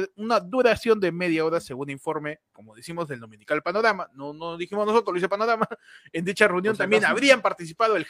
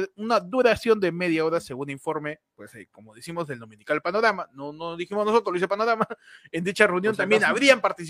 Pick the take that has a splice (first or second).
first